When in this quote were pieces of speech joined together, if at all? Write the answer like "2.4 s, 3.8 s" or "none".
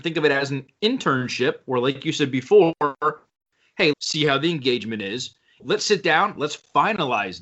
3.9 s, 5.6 s